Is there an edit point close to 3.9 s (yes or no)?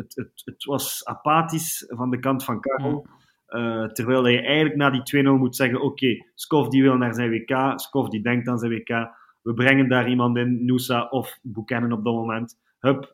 no